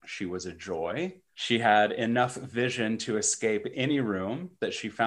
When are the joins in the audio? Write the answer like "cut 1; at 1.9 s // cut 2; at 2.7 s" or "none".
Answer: cut 1; at 1.3 s